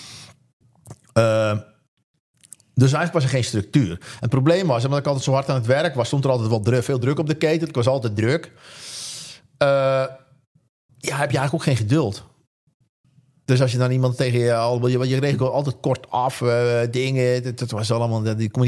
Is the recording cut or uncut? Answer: uncut